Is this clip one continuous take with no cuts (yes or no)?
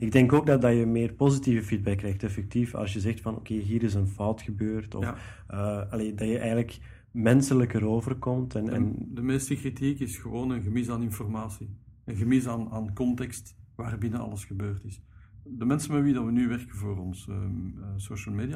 no